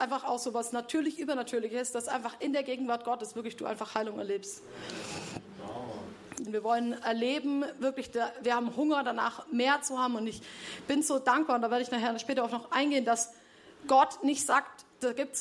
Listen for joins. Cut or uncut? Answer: cut